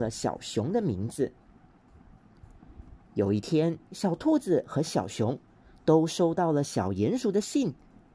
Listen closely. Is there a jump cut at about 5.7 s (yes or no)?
no